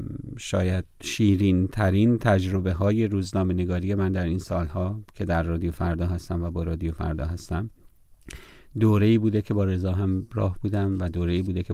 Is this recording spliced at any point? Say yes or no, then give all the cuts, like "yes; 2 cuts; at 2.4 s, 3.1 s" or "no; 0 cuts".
yes; 1 cut; at 0.9 s